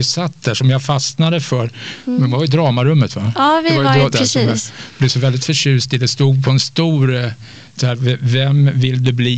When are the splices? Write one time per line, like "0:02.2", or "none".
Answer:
0:04.1